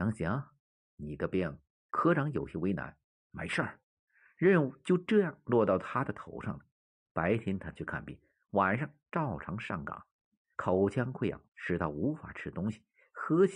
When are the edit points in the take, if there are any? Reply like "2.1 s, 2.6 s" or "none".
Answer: none